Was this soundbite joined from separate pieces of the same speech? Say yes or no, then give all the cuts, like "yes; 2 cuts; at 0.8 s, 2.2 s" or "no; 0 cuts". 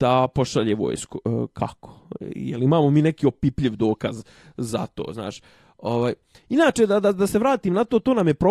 no; 0 cuts